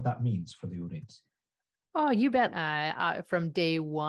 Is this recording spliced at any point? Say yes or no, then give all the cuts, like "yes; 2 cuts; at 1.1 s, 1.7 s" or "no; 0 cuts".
yes; 1 cut; at 2.5 s